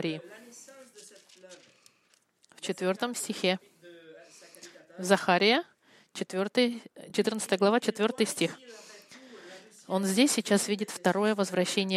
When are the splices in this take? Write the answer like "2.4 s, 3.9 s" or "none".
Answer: none

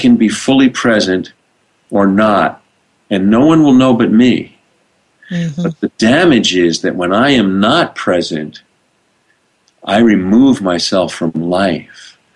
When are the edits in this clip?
none

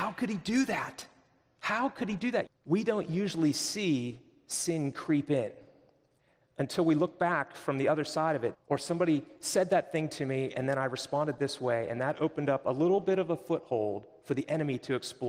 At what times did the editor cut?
2.5 s, 8.5 s

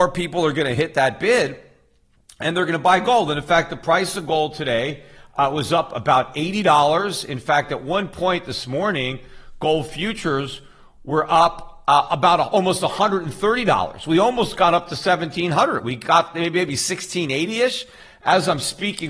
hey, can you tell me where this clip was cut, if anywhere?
none

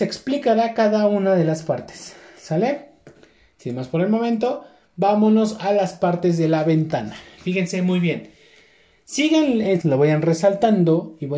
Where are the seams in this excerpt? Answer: 9.8 s

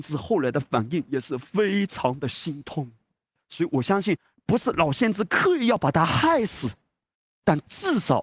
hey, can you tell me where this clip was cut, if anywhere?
none

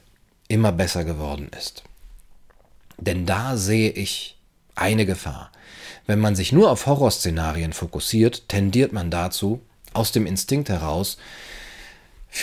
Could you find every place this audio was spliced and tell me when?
none

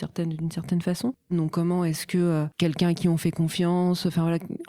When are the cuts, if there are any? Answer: 1.3 s

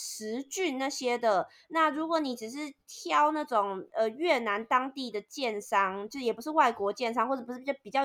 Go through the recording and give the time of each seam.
none

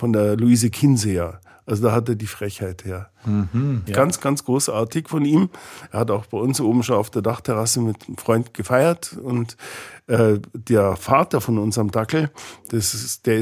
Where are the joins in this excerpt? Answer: 3.9 s

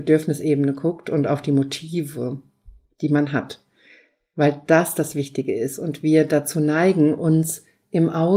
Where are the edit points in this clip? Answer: none

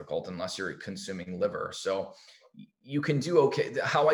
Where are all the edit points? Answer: none

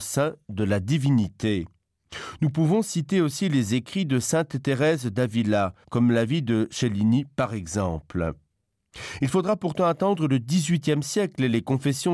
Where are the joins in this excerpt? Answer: 5.8 s

